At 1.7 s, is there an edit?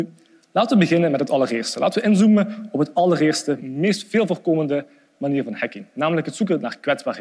no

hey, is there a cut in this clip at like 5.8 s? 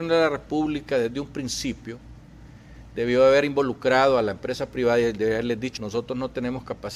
yes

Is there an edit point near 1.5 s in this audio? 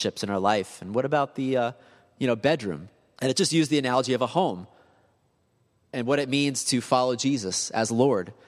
no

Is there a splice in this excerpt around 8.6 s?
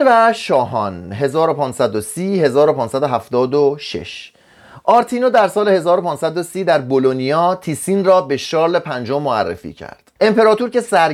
no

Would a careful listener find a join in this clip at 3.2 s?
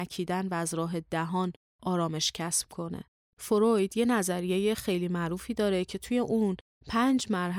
yes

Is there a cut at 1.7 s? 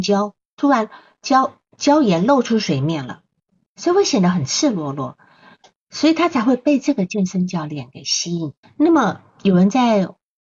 no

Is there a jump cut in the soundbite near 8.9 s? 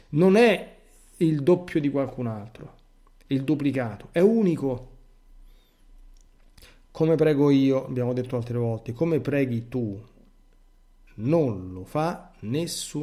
no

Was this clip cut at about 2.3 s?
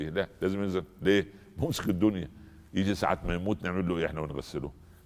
no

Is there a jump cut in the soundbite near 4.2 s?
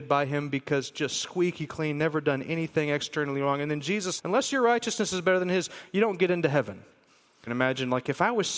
yes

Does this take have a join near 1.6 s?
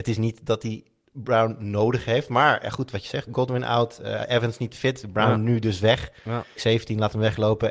no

